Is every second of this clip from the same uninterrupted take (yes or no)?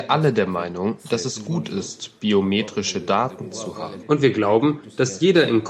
no